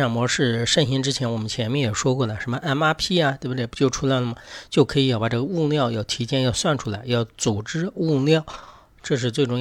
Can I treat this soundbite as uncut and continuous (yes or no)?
yes